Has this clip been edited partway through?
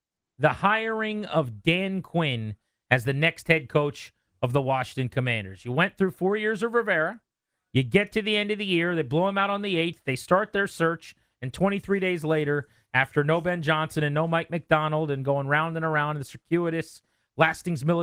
no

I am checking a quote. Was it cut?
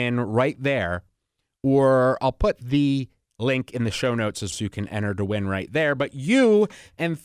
yes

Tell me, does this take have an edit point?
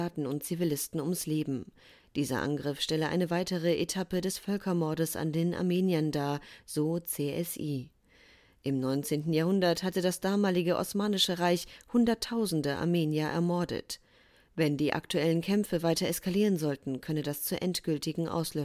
no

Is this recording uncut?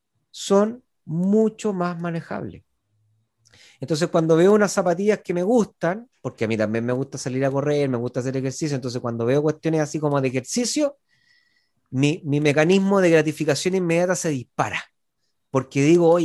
yes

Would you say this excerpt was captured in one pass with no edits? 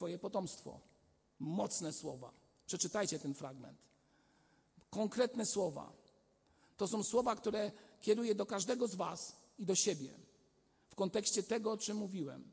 yes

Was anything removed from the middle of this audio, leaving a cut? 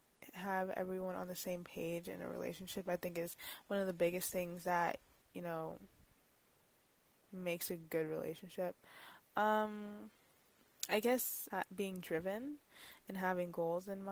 yes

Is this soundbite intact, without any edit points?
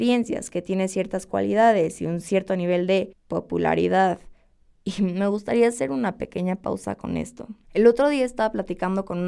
yes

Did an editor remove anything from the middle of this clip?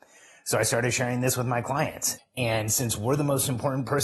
yes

